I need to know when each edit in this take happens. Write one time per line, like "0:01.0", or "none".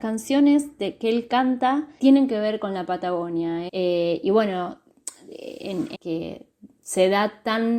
0:02.0
0:03.7
0:05.9